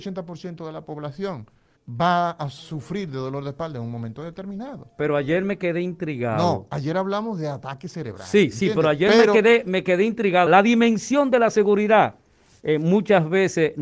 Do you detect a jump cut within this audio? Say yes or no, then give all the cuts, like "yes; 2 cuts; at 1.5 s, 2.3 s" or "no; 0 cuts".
yes; 2 cuts; at 1.8 s, 10.5 s